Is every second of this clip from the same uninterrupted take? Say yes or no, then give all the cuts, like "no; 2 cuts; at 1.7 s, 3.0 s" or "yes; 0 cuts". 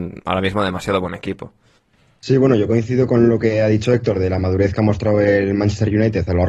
yes; 0 cuts